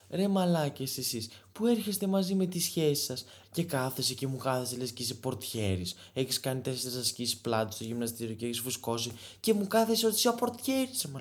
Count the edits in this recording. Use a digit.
1